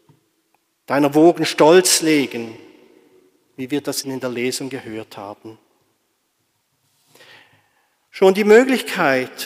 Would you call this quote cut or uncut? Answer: cut